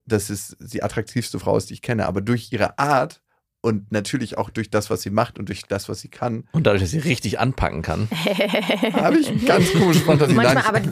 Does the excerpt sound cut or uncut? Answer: uncut